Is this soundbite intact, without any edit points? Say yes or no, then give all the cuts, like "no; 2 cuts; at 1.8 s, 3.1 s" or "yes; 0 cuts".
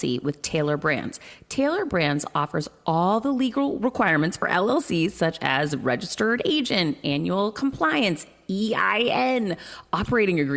yes; 0 cuts